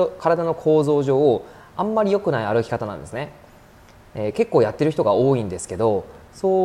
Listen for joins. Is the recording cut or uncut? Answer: uncut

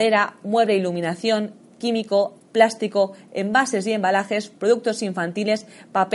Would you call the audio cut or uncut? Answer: cut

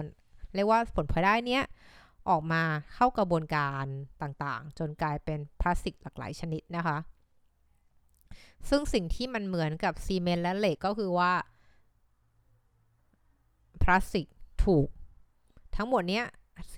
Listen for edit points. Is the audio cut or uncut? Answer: cut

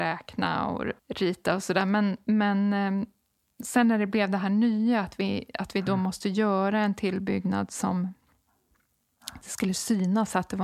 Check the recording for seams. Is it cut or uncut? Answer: cut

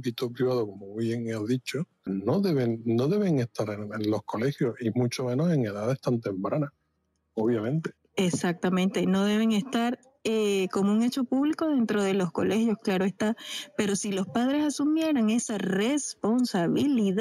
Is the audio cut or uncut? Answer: cut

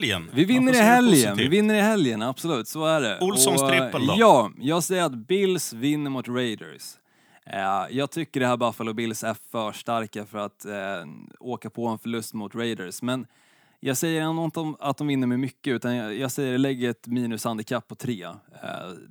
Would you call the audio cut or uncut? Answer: uncut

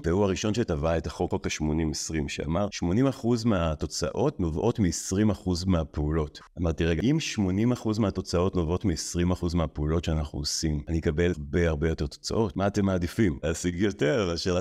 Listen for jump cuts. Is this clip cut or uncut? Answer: cut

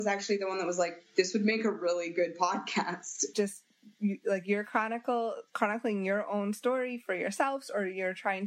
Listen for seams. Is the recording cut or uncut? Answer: cut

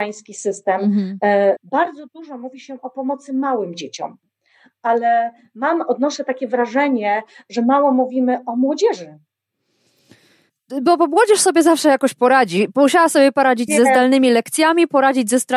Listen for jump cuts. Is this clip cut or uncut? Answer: cut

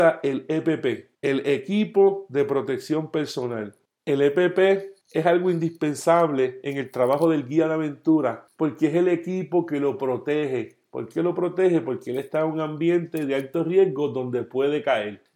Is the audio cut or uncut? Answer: cut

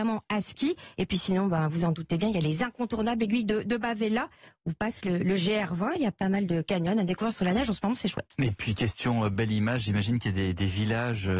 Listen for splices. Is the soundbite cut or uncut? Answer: uncut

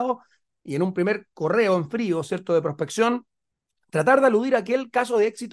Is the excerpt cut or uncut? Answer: uncut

